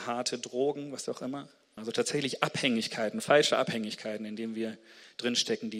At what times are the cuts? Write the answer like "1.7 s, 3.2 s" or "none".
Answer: 1.8 s